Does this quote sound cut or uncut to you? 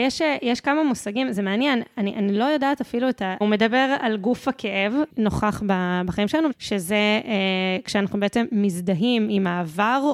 cut